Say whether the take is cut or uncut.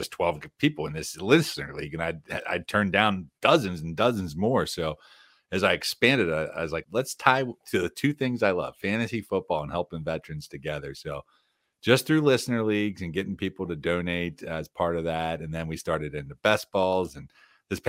cut